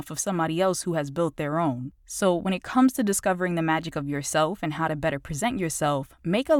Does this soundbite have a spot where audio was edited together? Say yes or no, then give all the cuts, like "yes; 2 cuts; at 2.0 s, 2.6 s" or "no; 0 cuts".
no; 0 cuts